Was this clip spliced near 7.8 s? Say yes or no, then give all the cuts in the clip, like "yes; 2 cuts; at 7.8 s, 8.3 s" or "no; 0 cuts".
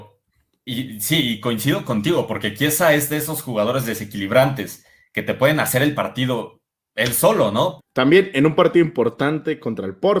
yes; 1 cut; at 7.8 s